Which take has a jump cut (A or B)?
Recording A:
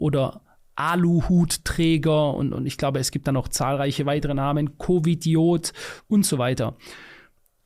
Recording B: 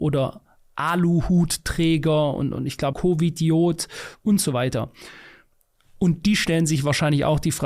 B